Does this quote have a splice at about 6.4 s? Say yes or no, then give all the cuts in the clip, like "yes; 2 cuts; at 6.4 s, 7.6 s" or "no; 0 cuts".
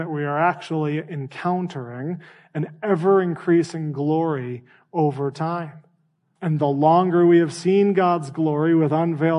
yes; 1 cut; at 6.4 s